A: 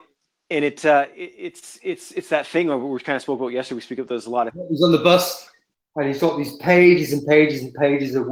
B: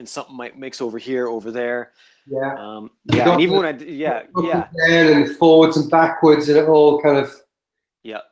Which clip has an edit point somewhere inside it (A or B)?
A